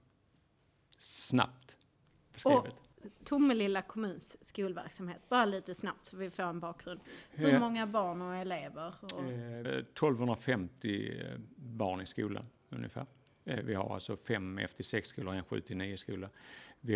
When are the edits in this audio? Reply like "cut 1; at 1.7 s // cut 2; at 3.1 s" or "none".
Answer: cut 1; at 9.6 s